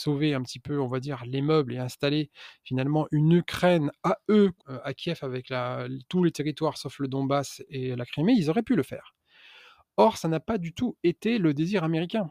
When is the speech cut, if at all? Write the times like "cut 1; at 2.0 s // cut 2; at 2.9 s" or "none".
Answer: cut 1; at 4.6 s

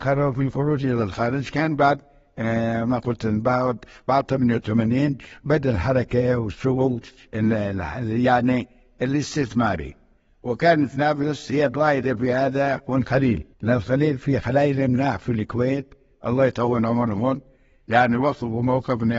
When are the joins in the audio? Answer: cut 1; at 13.5 s

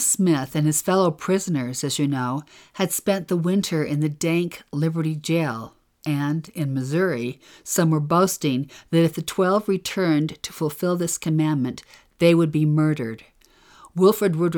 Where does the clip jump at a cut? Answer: none

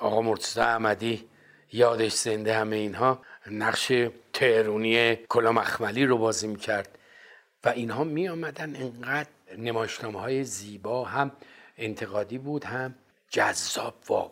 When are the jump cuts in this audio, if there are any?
cut 1; at 5.2 s

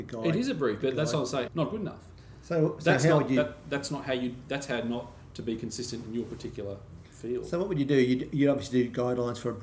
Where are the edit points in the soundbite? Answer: cut 1; at 1.5 s

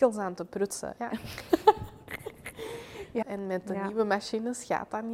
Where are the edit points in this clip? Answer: cut 1; at 1.0 s // cut 2; at 3.2 s

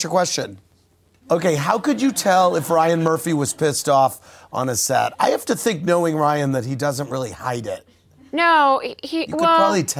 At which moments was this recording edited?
cut 1; at 1.2 s

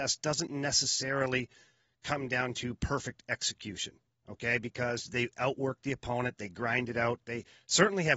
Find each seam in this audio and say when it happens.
none

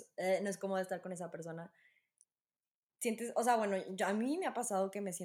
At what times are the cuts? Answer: none

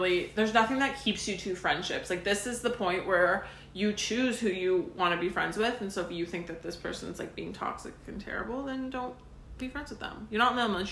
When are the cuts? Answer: none

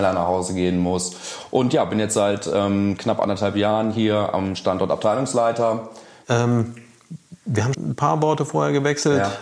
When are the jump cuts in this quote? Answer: cut 1; at 6.2 s // cut 2; at 7.7 s

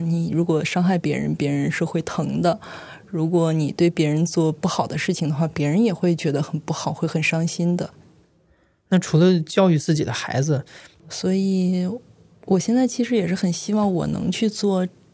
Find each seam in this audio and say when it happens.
cut 1; at 11.0 s

